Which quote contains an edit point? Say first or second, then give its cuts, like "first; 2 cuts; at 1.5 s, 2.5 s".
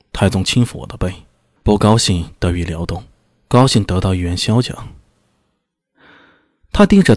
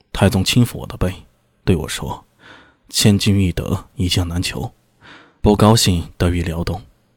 first; 2 cuts; at 1.6 s, 5.1 s